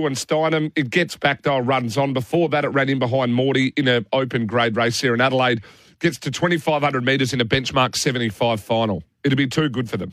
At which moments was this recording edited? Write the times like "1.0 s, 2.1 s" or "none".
9.1 s